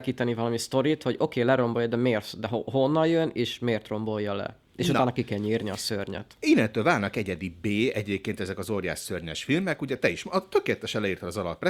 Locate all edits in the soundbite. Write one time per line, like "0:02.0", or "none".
none